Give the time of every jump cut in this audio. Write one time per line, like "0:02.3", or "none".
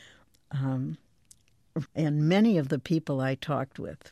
0:01.9